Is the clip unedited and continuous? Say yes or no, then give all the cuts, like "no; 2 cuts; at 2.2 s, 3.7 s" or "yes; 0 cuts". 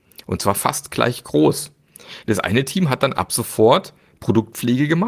yes; 0 cuts